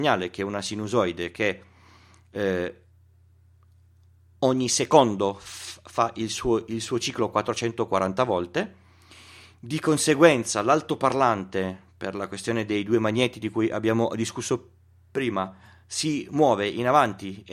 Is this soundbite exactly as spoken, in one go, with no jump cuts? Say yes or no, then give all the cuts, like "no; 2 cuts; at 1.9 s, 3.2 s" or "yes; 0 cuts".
yes; 0 cuts